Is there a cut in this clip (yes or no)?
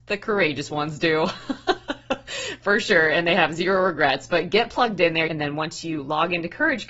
yes